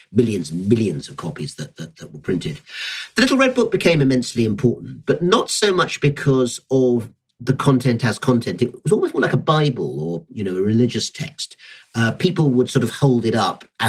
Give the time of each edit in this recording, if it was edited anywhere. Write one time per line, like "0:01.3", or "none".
none